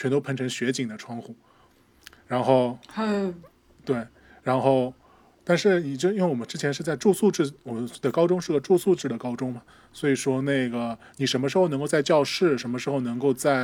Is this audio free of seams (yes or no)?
yes